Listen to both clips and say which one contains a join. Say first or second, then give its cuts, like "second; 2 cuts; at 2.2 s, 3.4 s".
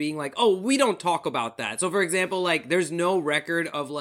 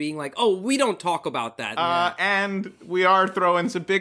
second; 1 cut; at 1.8 s